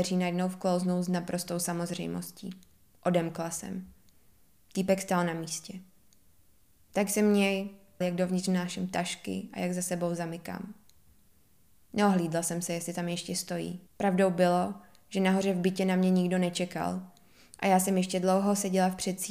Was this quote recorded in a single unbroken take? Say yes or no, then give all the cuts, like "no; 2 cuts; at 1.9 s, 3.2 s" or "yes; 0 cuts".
no; 2 cuts; at 8.0 s, 13.9 s